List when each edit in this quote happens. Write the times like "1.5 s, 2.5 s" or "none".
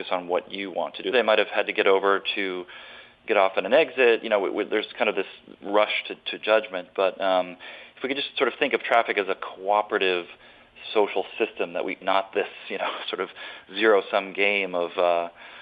1.1 s, 12.0 s

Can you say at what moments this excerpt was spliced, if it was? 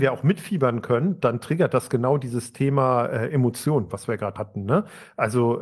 4.4 s

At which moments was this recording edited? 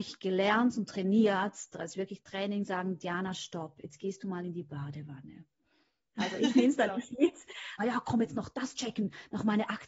6.1 s, 7.8 s

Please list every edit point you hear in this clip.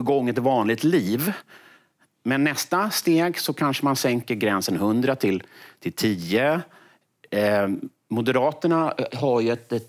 none

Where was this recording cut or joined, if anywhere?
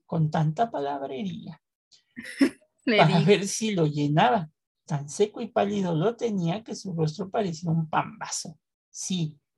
4.9 s

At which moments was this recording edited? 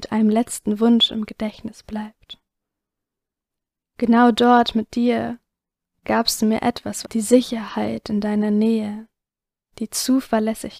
7.0 s

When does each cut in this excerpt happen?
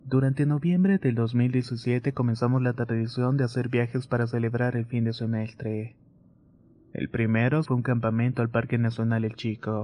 7.6 s

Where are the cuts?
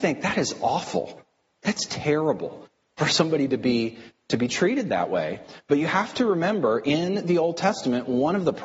none

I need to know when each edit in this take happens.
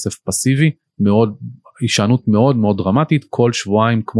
none

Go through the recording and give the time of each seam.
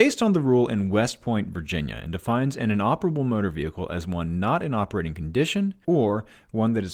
5.8 s

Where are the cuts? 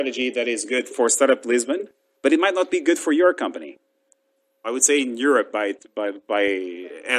4.6 s

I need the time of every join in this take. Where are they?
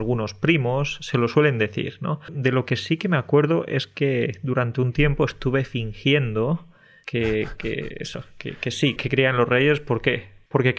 2.3 s, 9.0 s

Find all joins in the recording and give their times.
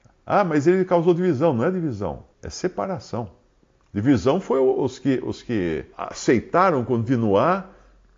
2.3 s, 5.9 s

